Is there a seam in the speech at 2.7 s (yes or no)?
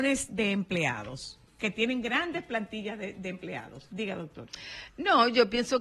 no